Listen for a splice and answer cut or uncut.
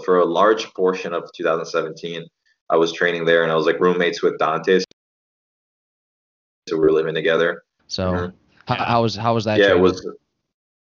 cut